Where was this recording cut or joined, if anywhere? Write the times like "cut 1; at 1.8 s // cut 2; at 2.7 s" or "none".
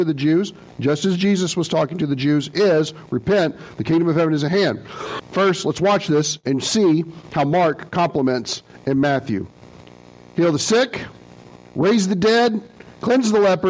cut 1; at 5.2 s